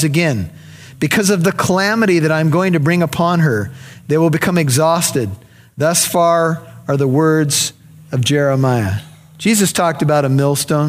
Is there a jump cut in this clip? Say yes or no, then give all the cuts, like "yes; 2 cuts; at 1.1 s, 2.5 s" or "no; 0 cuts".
no; 0 cuts